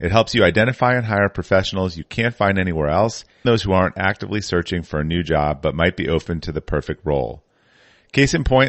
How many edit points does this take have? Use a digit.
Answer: 1